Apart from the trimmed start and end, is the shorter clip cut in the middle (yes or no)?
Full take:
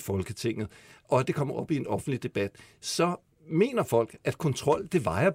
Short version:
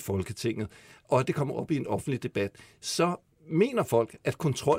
no